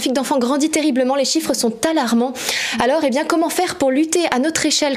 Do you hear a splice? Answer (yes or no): no